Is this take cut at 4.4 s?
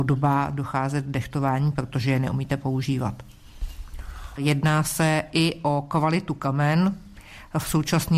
yes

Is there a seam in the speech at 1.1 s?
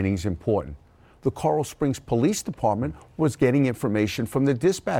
yes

